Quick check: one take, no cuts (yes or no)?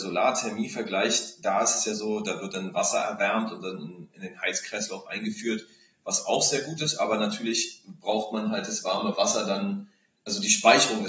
yes